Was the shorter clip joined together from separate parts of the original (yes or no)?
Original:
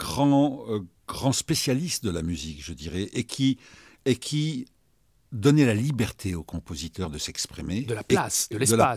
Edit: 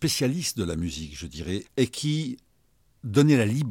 yes